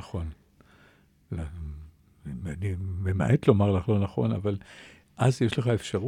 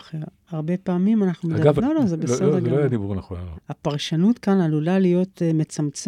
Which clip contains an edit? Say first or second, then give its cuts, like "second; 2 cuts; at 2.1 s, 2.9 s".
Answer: second; 2 cuts; at 1.8 s, 3.5 s